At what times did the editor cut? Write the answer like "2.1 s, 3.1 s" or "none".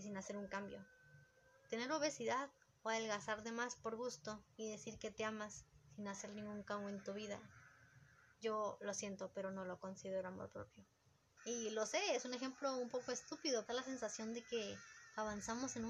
4.5 s, 11.4 s, 13.7 s